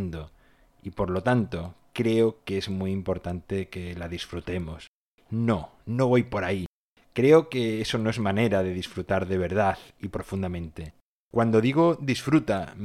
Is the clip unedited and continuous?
no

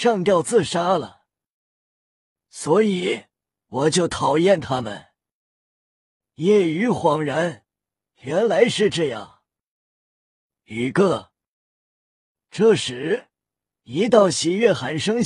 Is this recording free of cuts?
yes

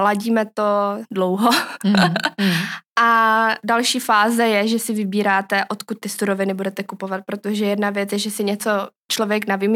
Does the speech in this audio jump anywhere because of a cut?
no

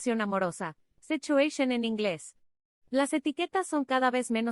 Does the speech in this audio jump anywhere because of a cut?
no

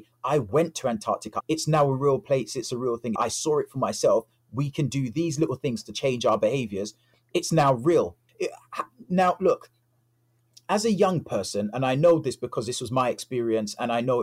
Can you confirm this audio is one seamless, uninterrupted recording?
no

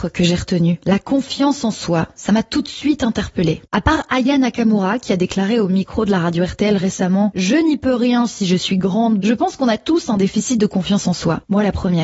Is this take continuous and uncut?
no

